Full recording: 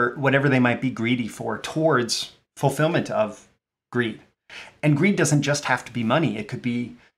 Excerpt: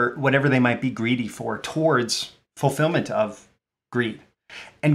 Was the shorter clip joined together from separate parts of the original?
no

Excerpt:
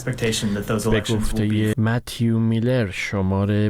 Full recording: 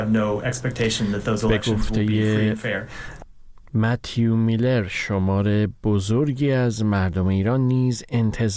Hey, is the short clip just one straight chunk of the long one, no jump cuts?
no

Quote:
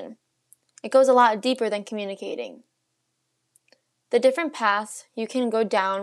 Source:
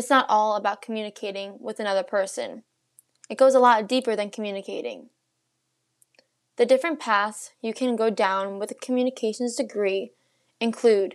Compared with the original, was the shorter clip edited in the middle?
no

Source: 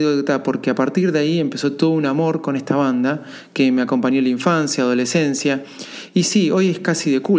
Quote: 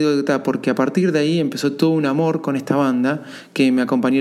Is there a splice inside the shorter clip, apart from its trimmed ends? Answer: no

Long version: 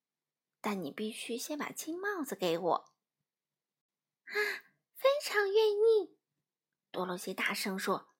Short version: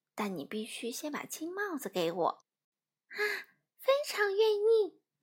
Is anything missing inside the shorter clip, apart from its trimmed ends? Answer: yes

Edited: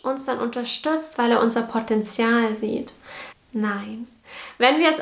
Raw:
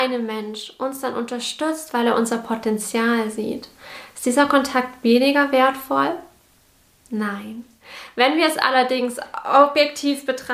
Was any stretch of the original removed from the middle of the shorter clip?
yes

